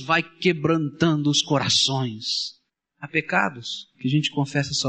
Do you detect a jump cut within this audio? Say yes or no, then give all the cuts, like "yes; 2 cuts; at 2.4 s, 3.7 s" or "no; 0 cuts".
no; 0 cuts